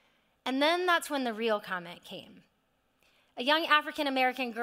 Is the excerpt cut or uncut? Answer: uncut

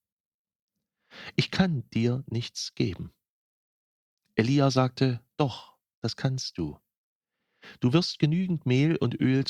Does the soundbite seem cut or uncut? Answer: uncut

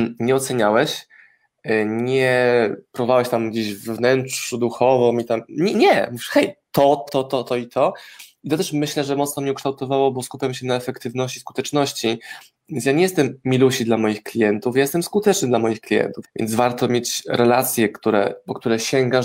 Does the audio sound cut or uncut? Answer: cut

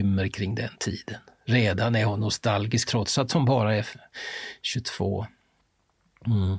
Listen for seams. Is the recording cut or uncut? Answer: cut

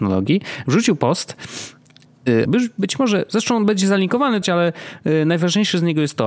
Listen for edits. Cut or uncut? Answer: cut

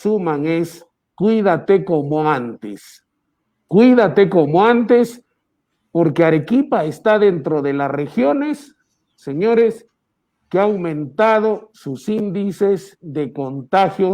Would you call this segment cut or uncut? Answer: uncut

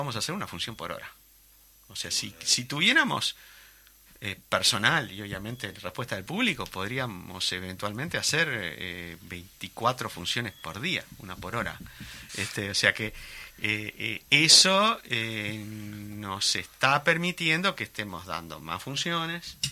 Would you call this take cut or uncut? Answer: cut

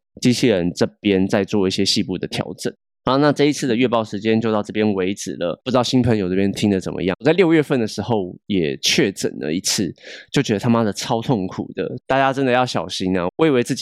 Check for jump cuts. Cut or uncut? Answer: cut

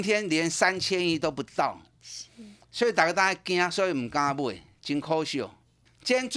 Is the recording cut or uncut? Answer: uncut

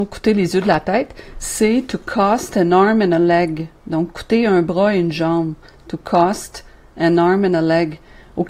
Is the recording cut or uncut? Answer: uncut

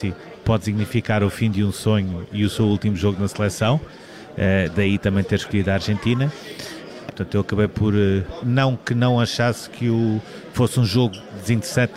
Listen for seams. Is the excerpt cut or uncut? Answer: cut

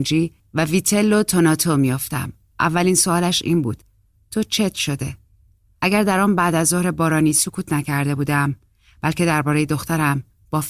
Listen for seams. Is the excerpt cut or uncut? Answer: uncut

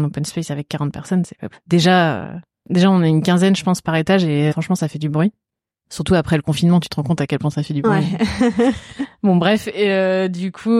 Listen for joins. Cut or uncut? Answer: cut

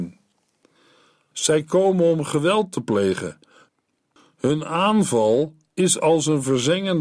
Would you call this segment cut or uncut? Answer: cut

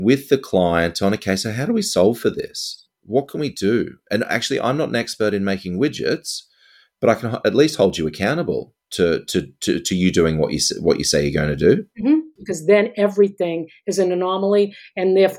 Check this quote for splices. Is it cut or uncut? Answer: cut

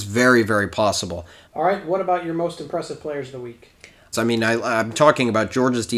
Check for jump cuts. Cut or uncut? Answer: cut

